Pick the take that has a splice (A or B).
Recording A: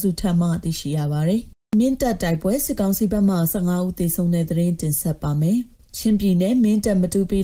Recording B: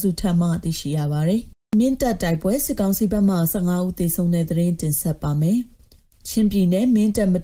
A